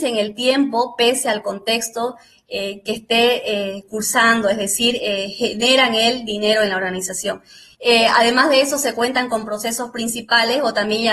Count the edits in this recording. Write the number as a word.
one